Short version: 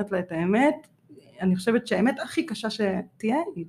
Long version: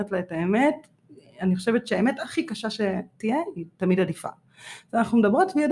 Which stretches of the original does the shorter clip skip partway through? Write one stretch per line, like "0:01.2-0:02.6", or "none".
none